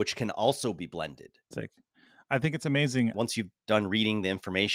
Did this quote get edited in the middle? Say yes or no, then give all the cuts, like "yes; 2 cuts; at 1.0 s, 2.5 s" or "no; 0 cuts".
yes; 2 cuts; at 1.5 s, 3.1 s